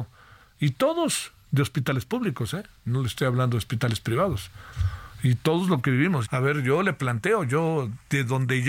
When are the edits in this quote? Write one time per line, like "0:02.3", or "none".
0:06.2